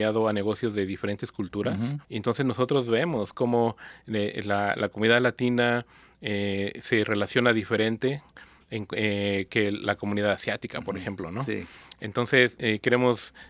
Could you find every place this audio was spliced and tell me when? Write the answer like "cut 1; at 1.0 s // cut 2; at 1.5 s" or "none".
cut 1; at 2.0 s

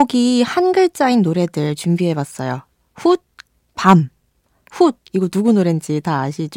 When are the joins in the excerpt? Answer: cut 1; at 3.6 s

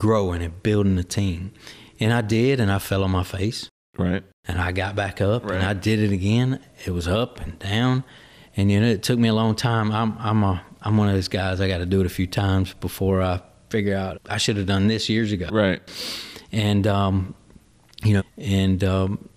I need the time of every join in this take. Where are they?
cut 1; at 14.1 s // cut 2; at 18.2 s

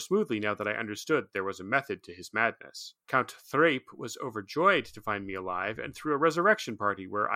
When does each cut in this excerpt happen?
cut 1; at 3.0 s

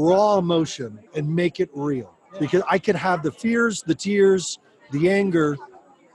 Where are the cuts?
cut 1; at 1.1 s // cut 2; at 2.3 s

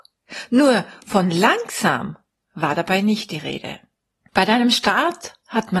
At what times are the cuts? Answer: cut 1; at 4.2 s

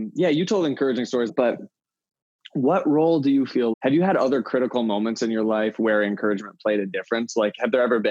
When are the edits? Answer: cut 1; at 1.3 s // cut 2; at 3.7 s

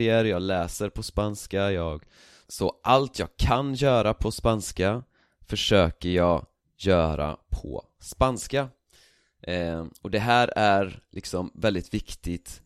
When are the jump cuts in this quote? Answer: none

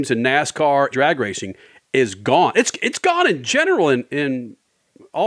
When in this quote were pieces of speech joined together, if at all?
cut 1; at 0.9 s

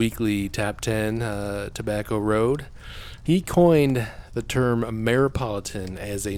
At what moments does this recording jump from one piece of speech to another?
cut 1; at 3.3 s

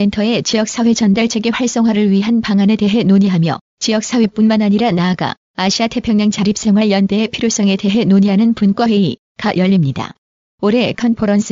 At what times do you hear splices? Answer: cut 1; at 10.5 s

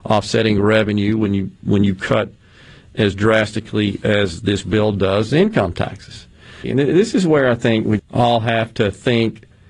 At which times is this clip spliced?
cut 1; at 6.6 s // cut 2; at 8.0 s

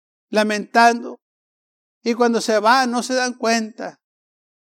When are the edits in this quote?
cut 1; at 1.8 s

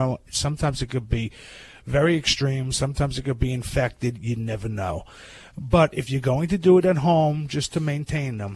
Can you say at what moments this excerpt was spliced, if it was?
none

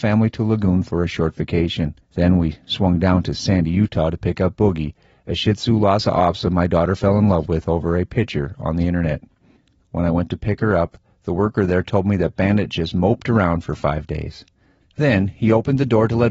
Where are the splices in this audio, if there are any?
cut 1; at 2.0 s // cut 2; at 9.8 s

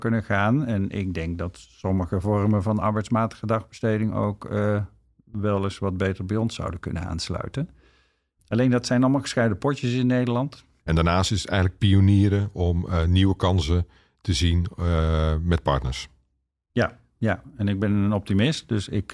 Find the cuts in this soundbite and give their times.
cut 1; at 10.8 s

